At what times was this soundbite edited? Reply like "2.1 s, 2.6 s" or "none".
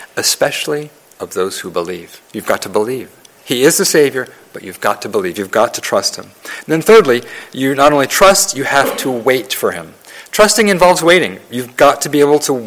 2.2 s